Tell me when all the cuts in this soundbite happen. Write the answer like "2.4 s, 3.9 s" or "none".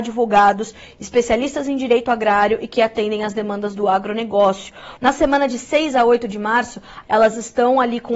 5.0 s, 7.0 s